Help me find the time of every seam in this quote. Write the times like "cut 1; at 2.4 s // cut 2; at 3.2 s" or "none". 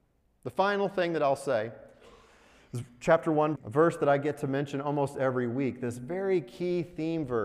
cut 1; at 3.6 s